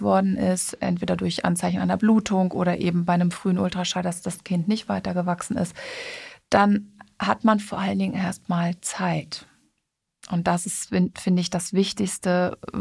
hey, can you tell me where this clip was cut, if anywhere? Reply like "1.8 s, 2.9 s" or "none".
none

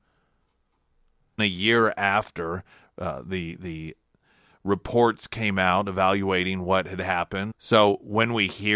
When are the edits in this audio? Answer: 1.4 s, 7.5 s

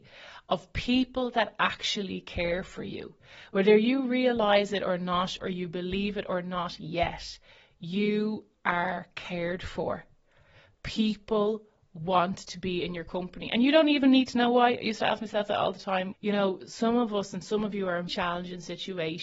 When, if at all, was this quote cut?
5.4 s, 16.1 s, 18.1 s

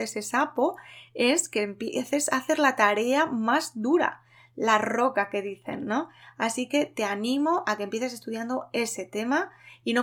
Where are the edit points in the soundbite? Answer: none

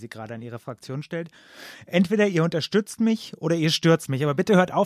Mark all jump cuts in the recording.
none

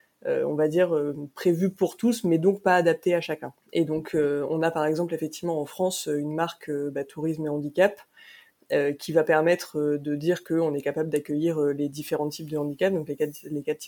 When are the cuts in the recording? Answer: 3.6 s

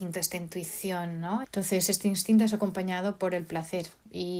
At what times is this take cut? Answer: 1.4 s

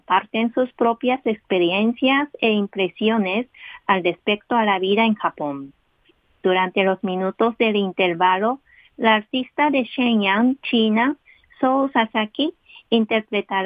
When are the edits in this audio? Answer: none

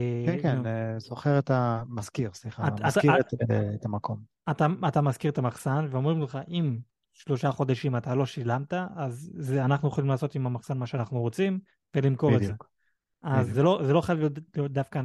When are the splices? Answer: none

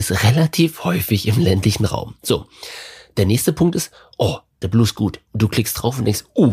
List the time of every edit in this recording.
4.6 s

